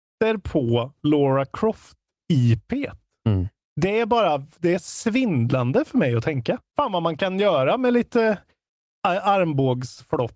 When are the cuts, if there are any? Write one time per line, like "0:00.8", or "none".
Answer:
0:06.7